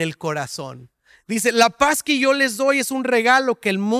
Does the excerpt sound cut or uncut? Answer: uncut